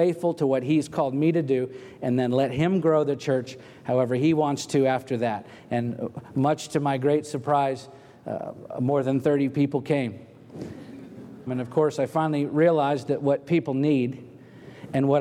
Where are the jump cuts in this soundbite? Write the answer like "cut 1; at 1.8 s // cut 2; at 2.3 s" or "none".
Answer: cut 1; at 11.5 s